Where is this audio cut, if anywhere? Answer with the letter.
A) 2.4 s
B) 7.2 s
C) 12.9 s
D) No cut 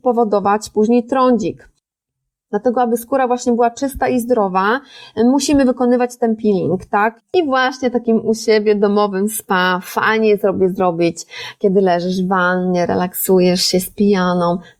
B